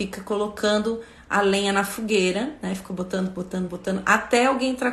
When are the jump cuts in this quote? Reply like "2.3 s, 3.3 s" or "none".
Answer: 3.7 s